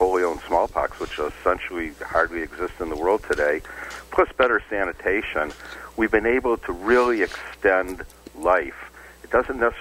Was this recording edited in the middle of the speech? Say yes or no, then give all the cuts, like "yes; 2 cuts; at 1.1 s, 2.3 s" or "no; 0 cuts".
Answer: no; 0 cuts